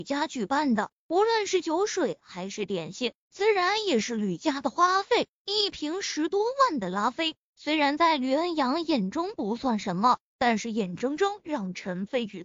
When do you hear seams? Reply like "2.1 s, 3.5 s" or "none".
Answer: none

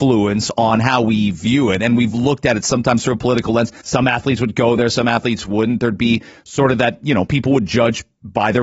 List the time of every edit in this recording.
3.8 s

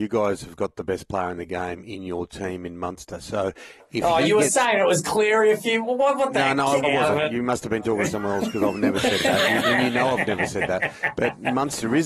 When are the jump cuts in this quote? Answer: 6.8 s

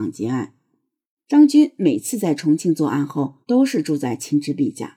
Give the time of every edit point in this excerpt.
1.2 s, 3.4 s

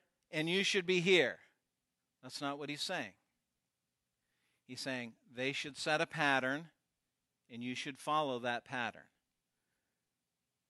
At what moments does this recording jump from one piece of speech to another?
none

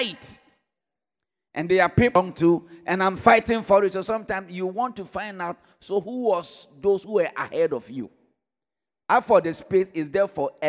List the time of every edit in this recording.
none

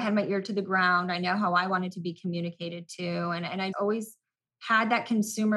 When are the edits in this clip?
3.7 s

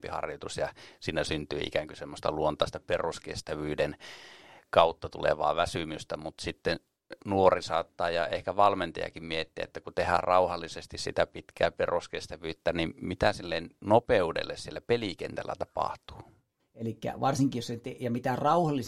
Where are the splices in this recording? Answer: 7.2 s, 16.6 s

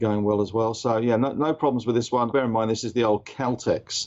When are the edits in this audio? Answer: 2.3 s

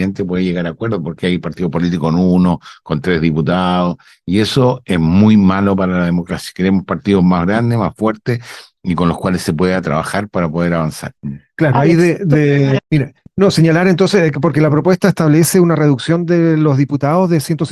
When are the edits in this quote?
12.8 s

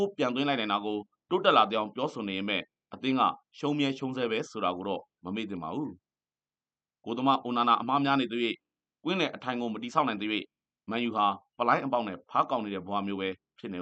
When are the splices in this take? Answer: none

